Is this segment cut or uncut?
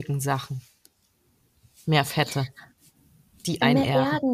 uncut